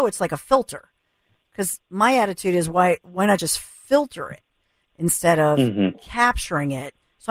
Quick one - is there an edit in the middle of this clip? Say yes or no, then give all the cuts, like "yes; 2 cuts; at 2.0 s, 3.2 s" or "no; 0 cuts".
no; 0 cuts